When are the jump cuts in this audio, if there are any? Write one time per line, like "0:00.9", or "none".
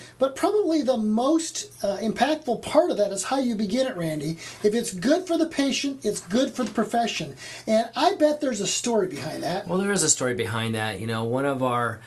none